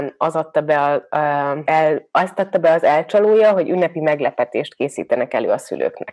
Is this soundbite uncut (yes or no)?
no